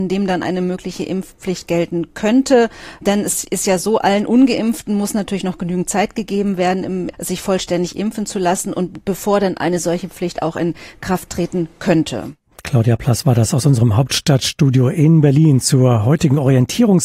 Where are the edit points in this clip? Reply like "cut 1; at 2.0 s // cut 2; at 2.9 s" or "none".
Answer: cut 1; at 7.1 s